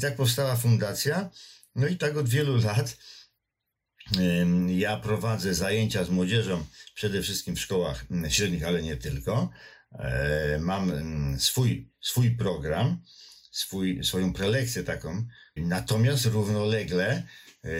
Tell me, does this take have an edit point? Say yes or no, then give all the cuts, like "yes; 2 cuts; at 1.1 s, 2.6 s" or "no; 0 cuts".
yes; 1 cut; at 15.6 s